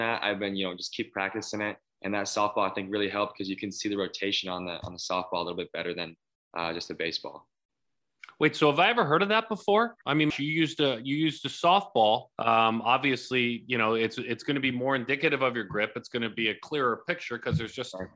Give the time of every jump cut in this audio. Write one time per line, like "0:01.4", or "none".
0:10.3
0:12.3